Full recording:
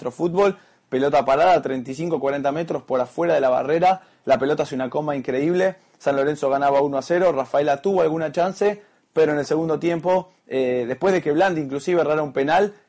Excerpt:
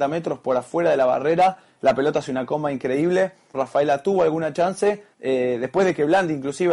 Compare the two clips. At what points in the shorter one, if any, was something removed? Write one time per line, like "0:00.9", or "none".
0:03.5
0:05.1